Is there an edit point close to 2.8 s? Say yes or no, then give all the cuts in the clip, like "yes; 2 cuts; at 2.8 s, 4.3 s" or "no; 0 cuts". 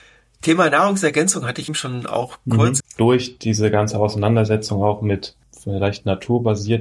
yes; 2 cuts; at 1.7 s, 2.8 s